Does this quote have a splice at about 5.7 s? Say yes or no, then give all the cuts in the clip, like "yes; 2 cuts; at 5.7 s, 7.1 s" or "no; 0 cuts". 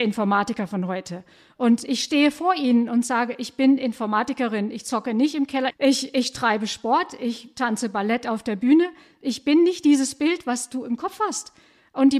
yes; 1 cut; at 5.7 s